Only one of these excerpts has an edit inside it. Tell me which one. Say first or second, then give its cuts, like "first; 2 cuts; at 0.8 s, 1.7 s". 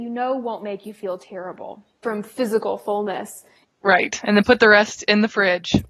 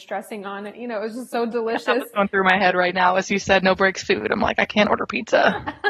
first; 2 cuts; at 2.0 s, 3.6 s